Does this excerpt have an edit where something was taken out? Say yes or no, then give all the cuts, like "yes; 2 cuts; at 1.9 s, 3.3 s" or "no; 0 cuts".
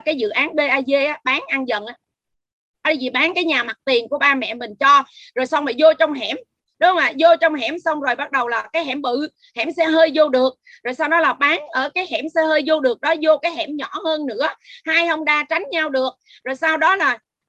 no; 0 cuts